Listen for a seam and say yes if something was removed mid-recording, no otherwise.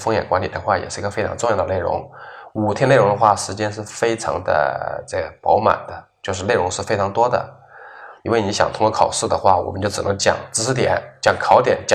yes